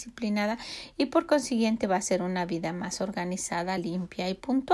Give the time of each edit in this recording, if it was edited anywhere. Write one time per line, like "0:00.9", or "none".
none